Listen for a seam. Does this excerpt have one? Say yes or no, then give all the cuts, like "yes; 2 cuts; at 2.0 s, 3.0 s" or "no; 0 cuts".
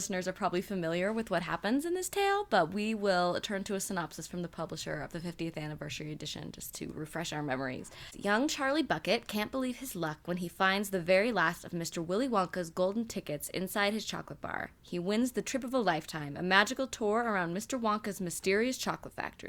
no; 0 cuts